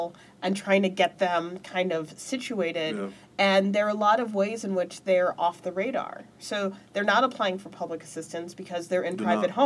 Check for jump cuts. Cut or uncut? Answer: uncut